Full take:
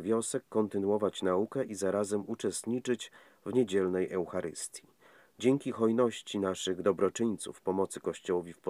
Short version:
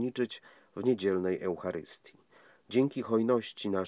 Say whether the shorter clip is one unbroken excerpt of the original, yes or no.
yes